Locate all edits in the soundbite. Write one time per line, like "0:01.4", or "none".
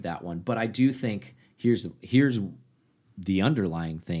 none

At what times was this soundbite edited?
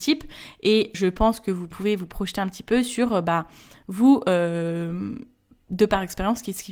0:00.9

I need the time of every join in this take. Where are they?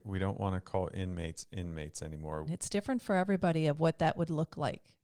0:02.5

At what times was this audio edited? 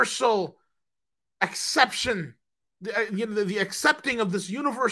none

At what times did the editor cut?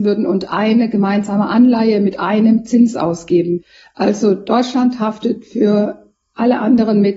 none

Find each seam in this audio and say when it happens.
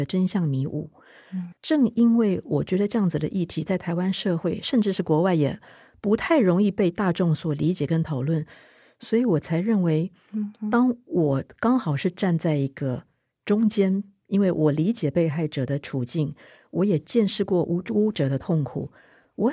0:01.5

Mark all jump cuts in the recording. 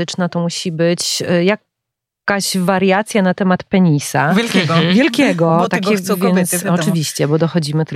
none

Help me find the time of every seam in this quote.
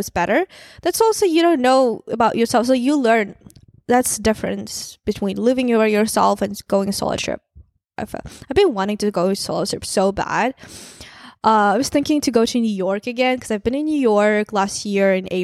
none

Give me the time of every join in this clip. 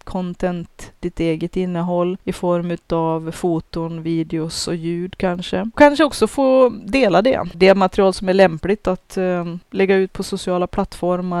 0:07.5

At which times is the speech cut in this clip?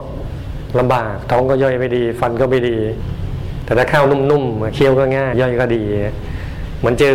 0:05.3

